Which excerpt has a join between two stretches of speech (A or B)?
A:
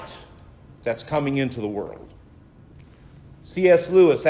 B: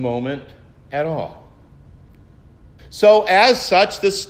B